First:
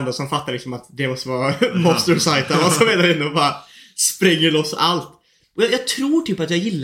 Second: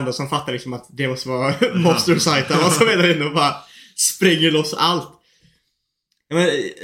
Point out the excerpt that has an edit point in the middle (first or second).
first